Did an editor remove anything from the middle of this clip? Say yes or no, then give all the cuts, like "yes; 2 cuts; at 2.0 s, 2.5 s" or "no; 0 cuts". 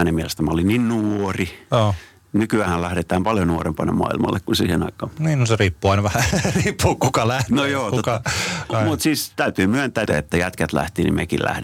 yes; 2 cuts; at 8.7 s, 10.1 s